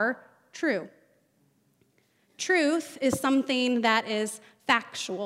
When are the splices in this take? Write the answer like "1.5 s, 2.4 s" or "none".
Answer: none